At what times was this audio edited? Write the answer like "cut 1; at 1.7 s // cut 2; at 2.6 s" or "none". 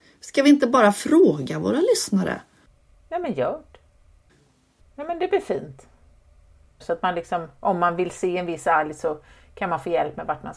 cut 1; at 4.8 s // cut 2; at 6.8 s